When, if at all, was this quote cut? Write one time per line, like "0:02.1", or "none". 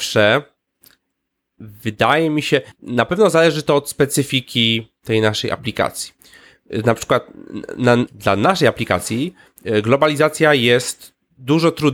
0:02.7
0:08.1